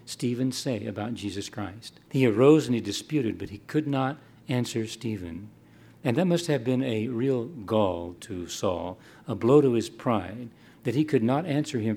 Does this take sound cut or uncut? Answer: cut